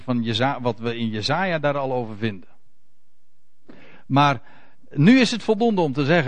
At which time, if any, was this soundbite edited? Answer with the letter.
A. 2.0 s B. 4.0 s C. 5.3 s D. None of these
D